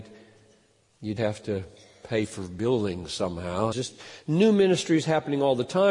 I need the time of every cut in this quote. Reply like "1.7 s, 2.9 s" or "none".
1.2 s, 3.7 s